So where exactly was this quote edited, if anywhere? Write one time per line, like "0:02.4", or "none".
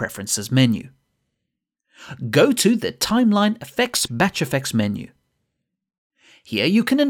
0:04.1